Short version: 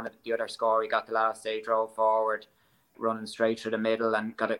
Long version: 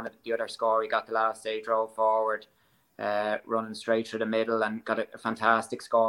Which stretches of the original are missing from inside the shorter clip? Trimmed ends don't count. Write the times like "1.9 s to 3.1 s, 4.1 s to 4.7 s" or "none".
2.9 s to 3.4 s